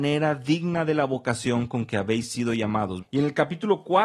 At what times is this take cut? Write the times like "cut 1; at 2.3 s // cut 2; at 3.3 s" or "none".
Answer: cut 1; at 3.0 s